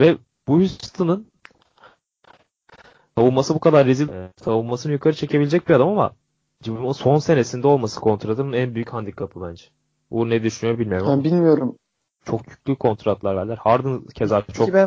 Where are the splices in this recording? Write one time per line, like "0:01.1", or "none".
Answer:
0:12.2